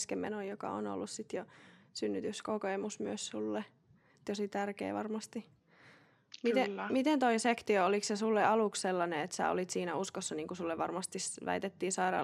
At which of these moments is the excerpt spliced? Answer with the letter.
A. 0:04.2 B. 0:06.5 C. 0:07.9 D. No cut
D